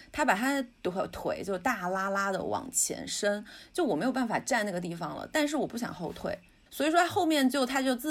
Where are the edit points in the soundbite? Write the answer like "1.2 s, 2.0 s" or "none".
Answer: 6.7 s

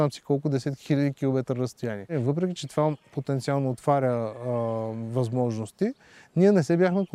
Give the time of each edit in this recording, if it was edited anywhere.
2.6 s

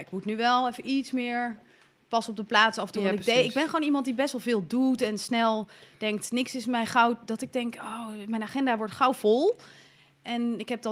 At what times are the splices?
none

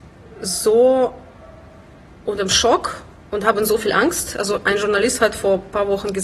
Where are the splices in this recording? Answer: none

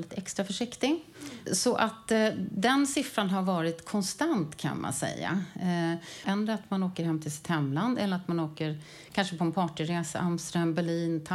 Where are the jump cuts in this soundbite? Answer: 1.5 s, 6.2 s

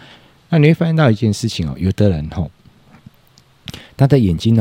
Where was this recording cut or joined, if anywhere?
none

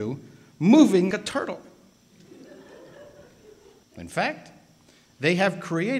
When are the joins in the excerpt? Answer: 1.1 s, 3.8 s

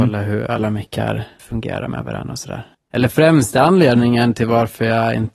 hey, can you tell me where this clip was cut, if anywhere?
1.4 s

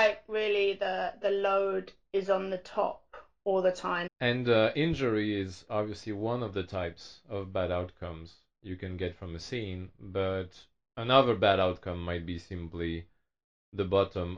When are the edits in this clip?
4.1 s

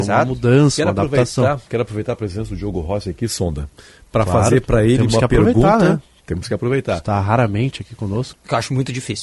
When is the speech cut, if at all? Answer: 8.3 s

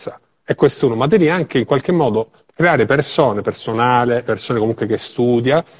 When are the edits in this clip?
4.2 s

